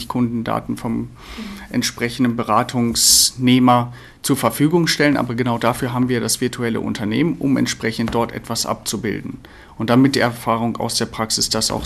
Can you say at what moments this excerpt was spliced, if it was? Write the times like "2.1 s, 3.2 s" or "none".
none